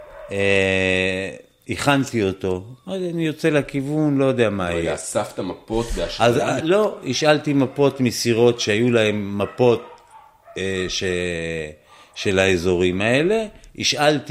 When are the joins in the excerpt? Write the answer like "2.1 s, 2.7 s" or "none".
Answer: 6.6 s